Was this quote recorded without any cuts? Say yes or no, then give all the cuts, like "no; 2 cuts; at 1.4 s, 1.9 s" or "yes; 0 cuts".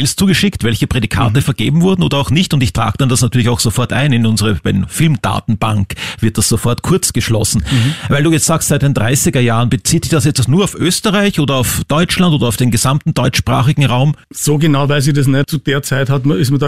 no; 2 cuts; at 14.2 s, 15.4 s